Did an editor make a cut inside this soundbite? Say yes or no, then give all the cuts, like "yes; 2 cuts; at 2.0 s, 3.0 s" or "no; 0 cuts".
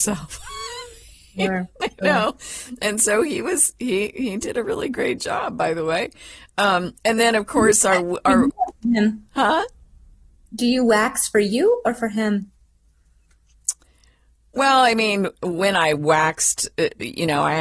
no; 0 cuts